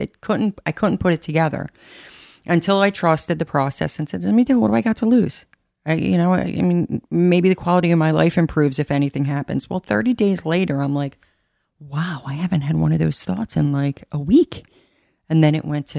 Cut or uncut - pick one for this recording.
uncut